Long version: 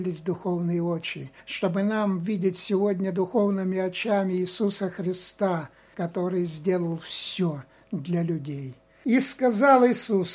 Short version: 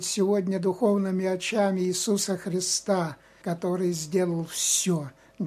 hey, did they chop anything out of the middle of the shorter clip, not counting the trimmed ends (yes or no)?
no